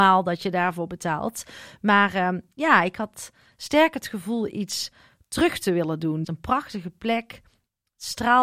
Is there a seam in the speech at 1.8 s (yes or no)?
no